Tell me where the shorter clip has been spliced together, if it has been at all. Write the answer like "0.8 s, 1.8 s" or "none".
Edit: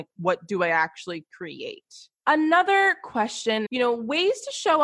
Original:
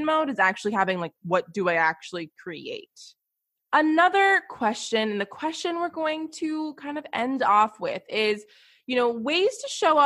2.2 s, 3.7 s